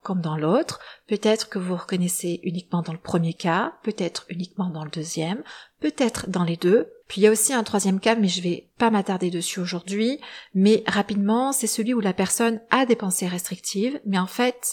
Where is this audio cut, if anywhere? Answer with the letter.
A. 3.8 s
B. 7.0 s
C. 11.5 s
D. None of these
B